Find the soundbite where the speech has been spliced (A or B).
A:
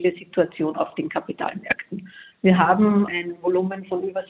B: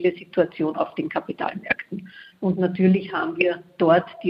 B